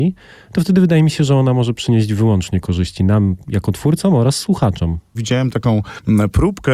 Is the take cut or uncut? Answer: cut